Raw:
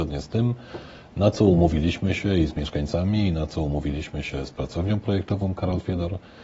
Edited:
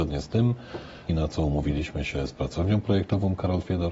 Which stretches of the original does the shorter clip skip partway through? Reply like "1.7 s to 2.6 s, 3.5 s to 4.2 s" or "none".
1.1 s to 3.3 s